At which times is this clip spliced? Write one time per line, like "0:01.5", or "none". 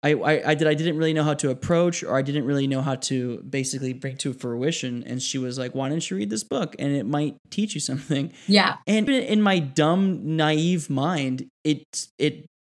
0:09.1